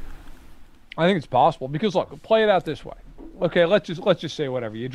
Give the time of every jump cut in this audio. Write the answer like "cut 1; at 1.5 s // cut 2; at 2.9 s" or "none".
none